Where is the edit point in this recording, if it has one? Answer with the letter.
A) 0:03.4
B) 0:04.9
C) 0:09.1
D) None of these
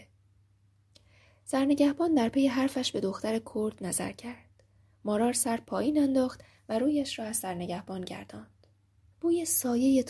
C